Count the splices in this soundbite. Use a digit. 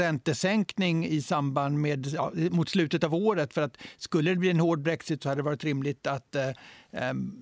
0